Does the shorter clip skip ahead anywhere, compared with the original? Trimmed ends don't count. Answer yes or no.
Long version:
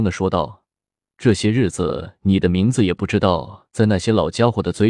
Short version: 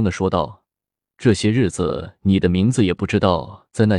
no